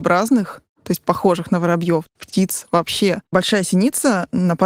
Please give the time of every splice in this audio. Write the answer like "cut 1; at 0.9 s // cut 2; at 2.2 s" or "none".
none